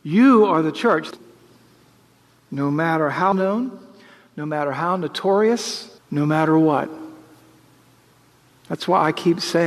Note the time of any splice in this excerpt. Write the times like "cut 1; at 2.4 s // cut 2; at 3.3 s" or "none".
cut 1; at 1.1 s // cut 2; at 3.3 s // cut 3; at 6.0 s